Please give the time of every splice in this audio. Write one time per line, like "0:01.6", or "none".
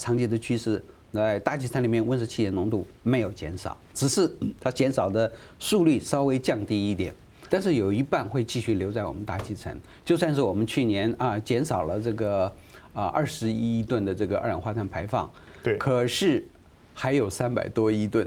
0:03.9
0:07.5